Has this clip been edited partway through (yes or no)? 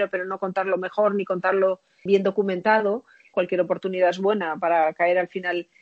yes